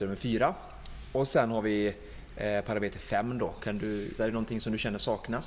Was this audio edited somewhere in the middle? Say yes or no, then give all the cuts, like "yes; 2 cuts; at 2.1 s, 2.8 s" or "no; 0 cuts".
yes; 1 cut; at 4.2 s